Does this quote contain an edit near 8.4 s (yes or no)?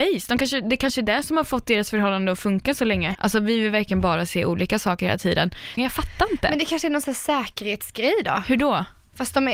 no